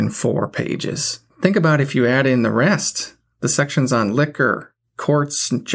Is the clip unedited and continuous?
no; 1 cut; at 1.3 s

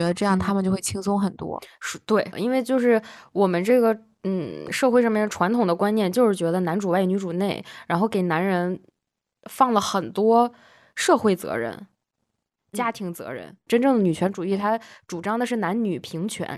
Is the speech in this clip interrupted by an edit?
yes; 2 cuts; at 2.3 s, 13.7 s

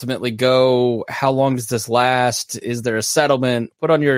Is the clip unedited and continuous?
yes; 0 cuts

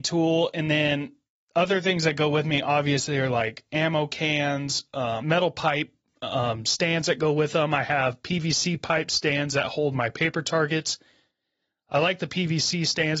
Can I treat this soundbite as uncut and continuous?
no; 1 cut; at 5.2 s

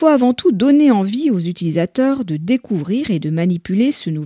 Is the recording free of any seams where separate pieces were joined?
yes; 0 cuts

